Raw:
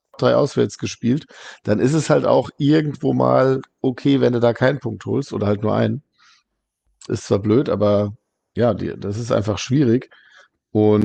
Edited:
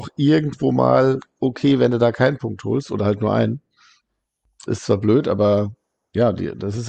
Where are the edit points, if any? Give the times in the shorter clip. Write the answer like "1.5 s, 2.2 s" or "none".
none